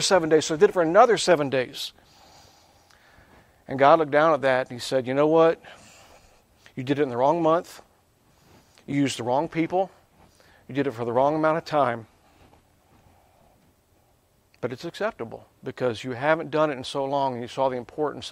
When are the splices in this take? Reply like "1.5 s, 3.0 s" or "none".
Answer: none